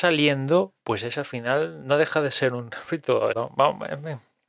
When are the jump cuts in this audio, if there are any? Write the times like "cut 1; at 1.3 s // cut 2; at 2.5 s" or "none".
cut 1; at 3.3 s

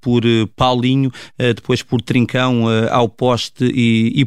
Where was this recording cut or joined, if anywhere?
none

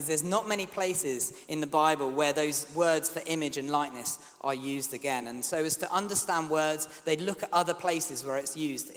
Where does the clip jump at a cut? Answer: none

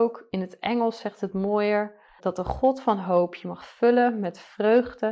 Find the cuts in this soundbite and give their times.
cut 1; at 2.2 s

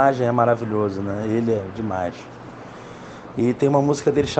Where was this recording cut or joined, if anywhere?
cut 1; at 3.3 s

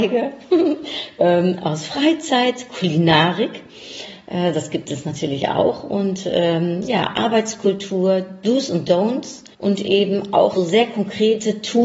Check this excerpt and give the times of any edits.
cut 1; at 9.5 s // cut 2; at 10.6 s

